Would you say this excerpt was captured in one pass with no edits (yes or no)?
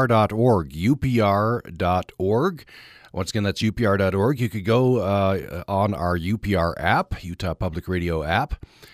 yes